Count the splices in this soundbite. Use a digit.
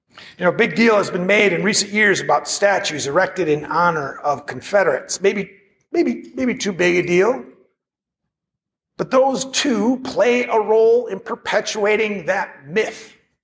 0